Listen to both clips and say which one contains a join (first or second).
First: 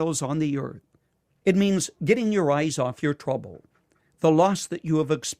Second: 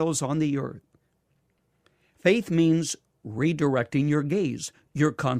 first